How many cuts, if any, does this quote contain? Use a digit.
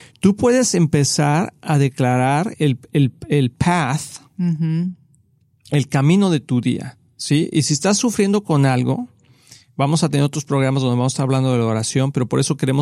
0